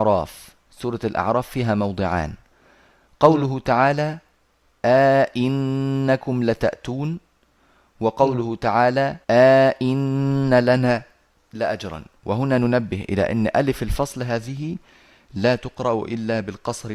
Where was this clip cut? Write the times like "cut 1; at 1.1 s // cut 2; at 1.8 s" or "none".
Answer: cut 1; at 9.2 s

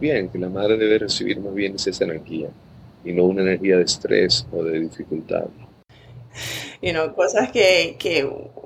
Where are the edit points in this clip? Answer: cut 1; at 6.3 s

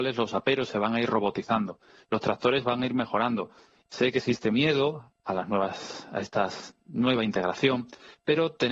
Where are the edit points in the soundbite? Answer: cut 1; at 3.8 s

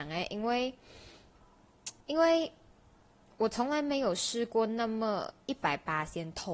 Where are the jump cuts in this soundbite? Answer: cut 1; at 2.0 s

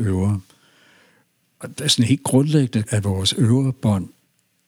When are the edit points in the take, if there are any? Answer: cut 1; at 2.9 s

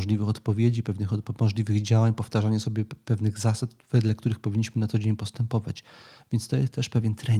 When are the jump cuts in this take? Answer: none

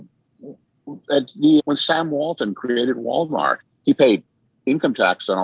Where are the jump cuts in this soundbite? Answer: cut 1; at 1.6 s

